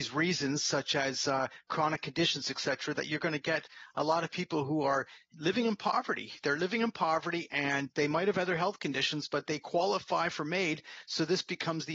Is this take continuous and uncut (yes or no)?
yes